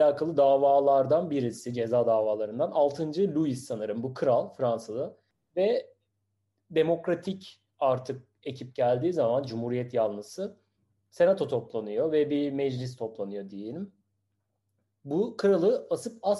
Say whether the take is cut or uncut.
uncut